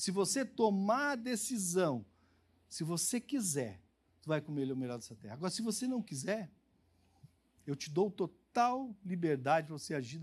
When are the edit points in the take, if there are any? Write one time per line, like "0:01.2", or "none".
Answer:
none